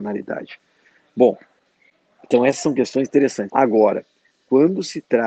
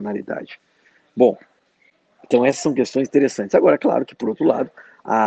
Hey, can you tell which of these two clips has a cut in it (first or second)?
first